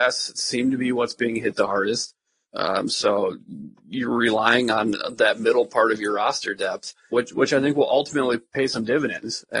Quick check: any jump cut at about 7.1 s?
yes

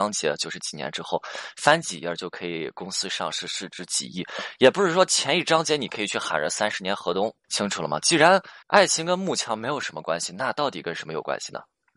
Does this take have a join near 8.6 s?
yes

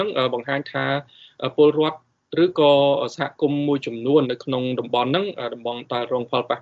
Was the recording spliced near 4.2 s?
yes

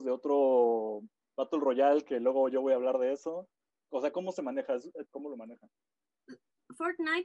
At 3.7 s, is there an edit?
no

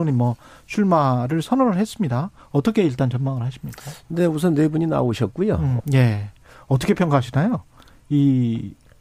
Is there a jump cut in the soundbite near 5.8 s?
yes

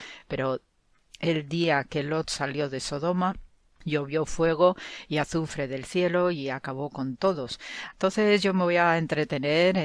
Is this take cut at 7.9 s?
yes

